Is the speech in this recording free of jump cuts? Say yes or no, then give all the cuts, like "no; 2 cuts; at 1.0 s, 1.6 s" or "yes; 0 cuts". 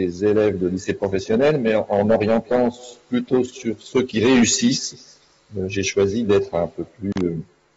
yes; 0 cuts